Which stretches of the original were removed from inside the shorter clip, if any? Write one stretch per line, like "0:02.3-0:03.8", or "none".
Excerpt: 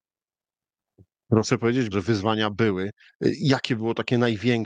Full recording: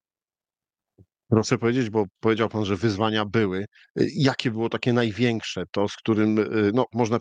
0:01.9-0:02.7